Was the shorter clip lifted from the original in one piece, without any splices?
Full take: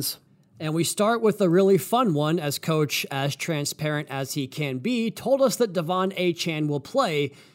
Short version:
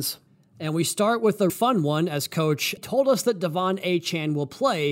no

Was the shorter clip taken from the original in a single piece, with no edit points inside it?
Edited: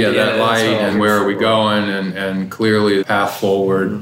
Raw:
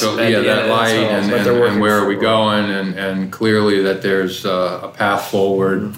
no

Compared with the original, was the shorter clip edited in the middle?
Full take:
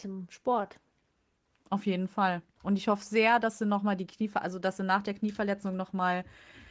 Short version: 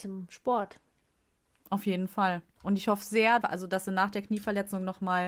yes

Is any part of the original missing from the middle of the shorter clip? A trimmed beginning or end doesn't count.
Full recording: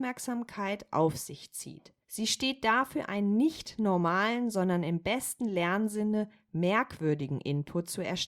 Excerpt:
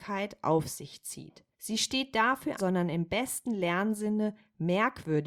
yes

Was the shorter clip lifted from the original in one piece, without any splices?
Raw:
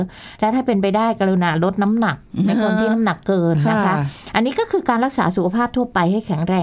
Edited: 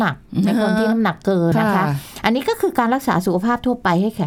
no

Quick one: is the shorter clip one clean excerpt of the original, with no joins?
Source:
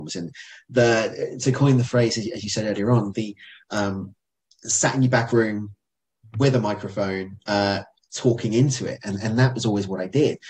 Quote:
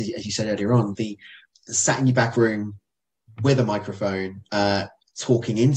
no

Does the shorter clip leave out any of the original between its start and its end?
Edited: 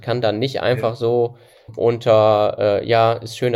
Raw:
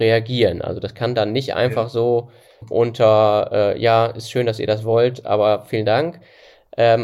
no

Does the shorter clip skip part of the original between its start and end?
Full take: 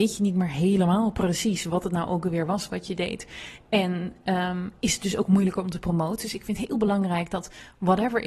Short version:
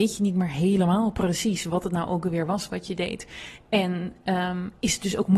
no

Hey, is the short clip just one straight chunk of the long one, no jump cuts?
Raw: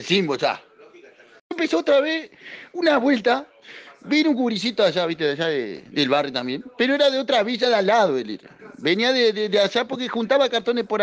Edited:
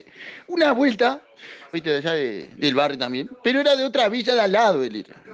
no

